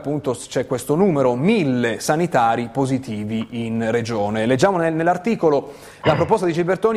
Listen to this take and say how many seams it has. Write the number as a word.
zero